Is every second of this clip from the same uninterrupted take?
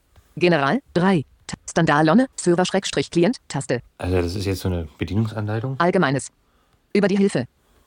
no; 2 cuts; at 2.3 s, 3.4 s

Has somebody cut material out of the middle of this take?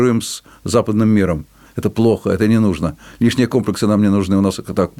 yes; 1 cut; at 1.7 s

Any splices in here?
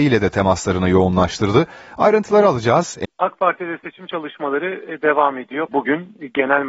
yes; 2 cuts; at 3.0 s, 5.7 s

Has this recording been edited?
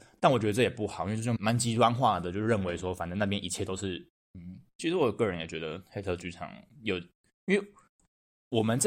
yes; 2 cuts; at 1.4 s, 4.2 s

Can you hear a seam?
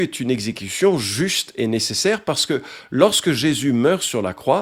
no; 0 cuts

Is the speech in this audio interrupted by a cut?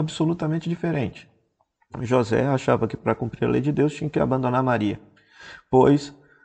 no; 0 cuts

